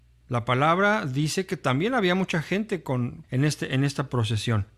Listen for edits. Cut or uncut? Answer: cut